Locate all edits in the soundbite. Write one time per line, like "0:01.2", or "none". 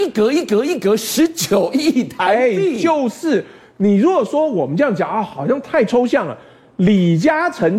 none